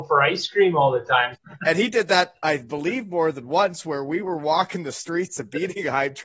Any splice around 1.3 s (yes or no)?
yes